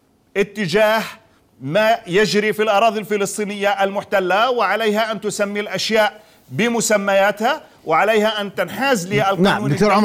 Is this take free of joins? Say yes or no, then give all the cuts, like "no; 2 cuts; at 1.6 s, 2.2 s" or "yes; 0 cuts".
yes; 0 cuts